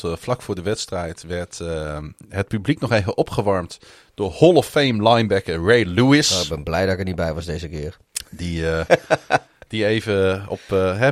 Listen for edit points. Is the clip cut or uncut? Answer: uncut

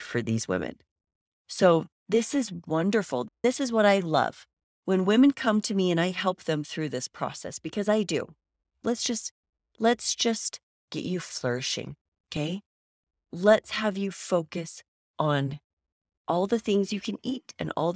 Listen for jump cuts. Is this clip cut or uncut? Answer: cut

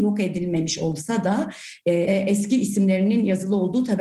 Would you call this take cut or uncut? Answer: cut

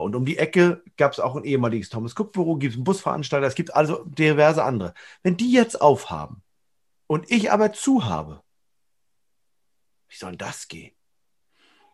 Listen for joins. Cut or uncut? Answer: uncut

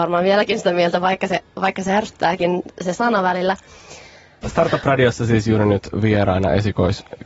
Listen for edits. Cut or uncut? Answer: cut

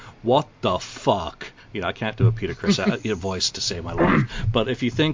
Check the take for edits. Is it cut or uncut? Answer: uncut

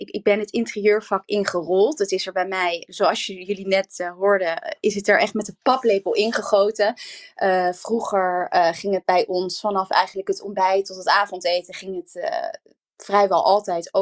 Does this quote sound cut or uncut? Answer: uncut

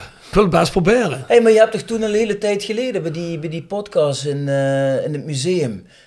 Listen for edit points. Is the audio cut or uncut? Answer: uncut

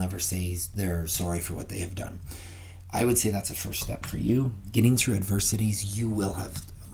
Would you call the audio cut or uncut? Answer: uncut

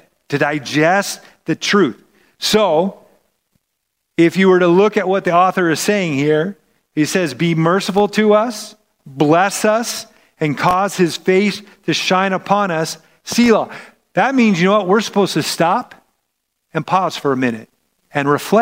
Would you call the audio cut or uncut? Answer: uncut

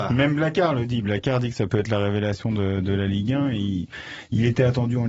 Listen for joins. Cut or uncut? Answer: uncut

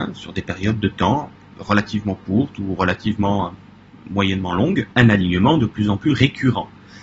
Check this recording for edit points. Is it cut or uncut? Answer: cut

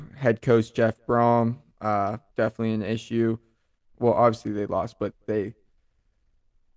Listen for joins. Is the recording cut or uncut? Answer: cut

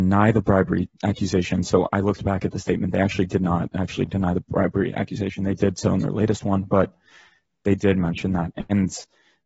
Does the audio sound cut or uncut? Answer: uncut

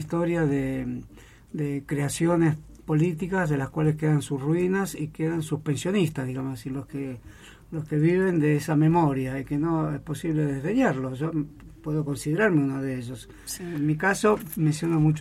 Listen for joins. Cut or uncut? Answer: cut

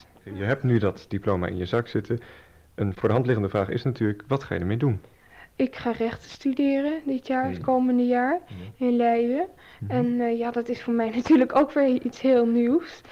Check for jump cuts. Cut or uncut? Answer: uncut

